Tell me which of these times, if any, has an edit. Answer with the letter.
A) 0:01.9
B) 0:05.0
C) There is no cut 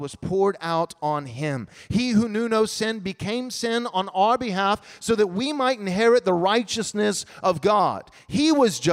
C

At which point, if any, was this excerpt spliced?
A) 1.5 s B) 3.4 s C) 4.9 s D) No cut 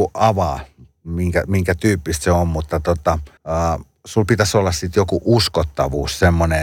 B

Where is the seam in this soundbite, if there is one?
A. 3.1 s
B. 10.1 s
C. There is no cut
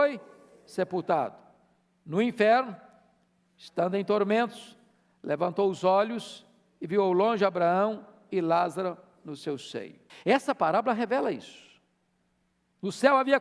B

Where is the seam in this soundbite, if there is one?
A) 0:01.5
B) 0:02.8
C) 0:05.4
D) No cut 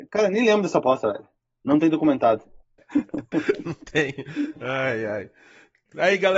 B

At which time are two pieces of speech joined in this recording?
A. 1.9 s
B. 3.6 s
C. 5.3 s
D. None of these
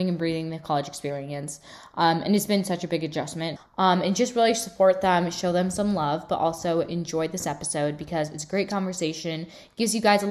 B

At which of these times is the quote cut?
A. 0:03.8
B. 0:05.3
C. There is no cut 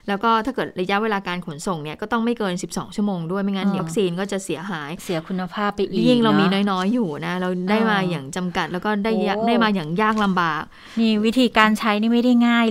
A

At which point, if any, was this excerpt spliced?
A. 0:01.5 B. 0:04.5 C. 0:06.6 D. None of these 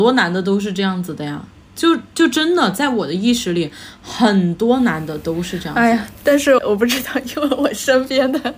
C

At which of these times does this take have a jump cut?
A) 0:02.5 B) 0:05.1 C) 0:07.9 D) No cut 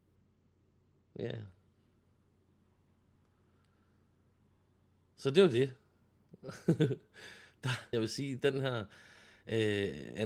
C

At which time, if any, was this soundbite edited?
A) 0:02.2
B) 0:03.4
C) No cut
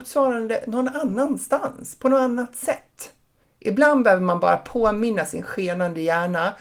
B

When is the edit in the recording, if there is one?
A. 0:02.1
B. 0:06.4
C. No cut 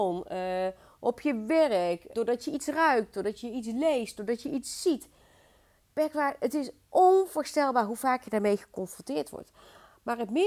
A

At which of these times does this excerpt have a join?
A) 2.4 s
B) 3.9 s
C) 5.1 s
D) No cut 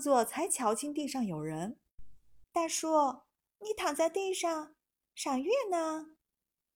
A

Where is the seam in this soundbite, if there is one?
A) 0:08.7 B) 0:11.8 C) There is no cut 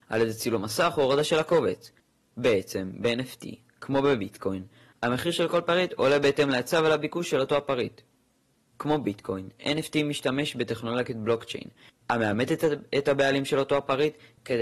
C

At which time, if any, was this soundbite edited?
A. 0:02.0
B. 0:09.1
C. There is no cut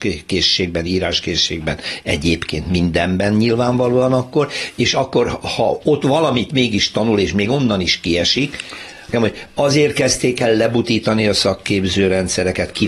B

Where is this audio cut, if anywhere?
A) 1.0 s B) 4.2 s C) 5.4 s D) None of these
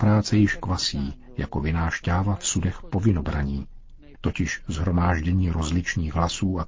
B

